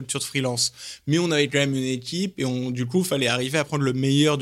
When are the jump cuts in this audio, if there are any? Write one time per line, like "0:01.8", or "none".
none